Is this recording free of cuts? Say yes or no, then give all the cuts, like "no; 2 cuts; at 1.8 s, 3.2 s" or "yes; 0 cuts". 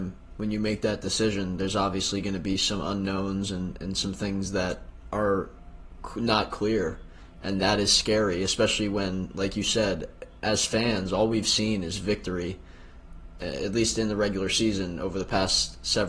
yes; 0 cuts